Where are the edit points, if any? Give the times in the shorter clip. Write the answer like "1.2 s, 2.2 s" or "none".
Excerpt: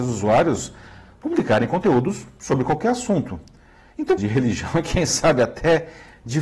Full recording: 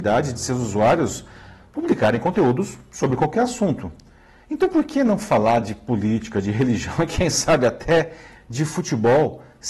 4.2 s